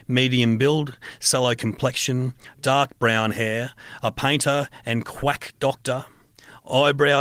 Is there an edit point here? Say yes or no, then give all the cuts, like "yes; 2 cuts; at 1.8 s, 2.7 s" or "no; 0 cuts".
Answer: no; 0 cuts